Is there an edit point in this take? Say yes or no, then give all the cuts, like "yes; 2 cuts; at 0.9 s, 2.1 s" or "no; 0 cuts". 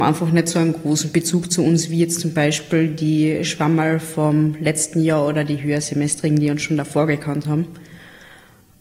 no; 0 cuts